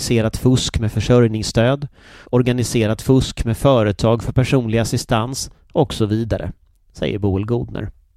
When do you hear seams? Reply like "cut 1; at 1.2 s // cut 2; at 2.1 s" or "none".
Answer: cut 1; at 2.2 s